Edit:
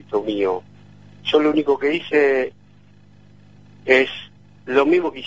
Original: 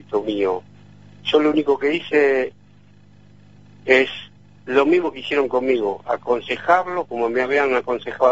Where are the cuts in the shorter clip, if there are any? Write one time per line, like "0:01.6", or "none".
none